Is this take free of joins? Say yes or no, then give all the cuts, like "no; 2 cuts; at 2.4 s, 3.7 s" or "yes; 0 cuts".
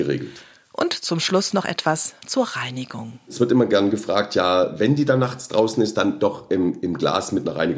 yes; 0 cuts